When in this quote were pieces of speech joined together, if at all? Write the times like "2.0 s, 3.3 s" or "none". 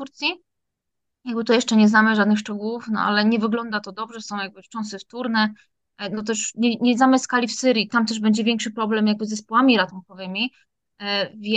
7.9 s